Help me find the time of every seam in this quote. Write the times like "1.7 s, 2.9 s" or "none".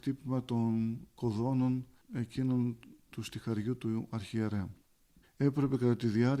5.2 s

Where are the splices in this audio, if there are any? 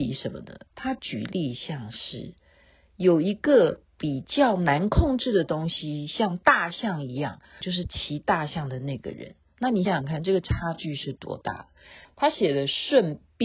7.6 s, 9.9 s, 12.1 s

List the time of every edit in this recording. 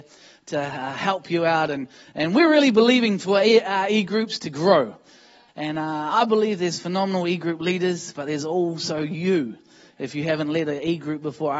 5.5 s

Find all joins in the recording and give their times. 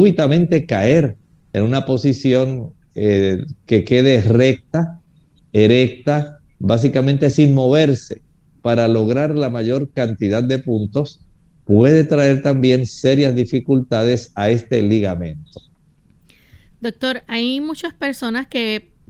none

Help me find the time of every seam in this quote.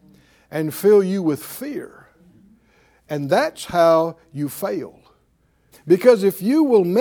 5.7 s

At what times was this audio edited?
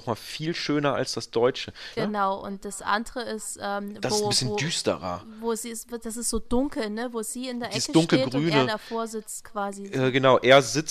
2.0 s

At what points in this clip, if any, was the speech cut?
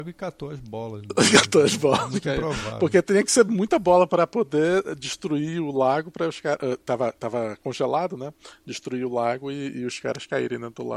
none

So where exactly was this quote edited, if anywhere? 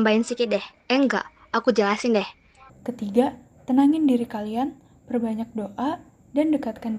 2.7 s

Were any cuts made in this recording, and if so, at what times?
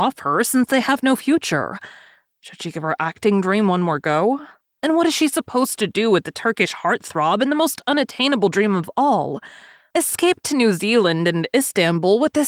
2.3 s, 9.9 s

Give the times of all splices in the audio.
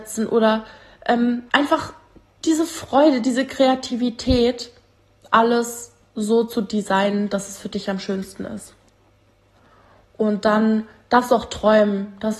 1.5 s

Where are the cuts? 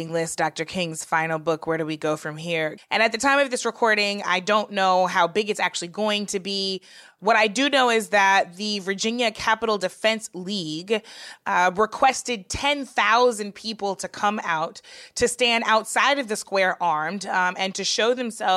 2.8 s

